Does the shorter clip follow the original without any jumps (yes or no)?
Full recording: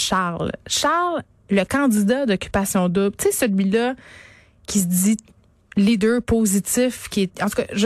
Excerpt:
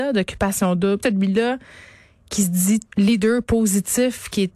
no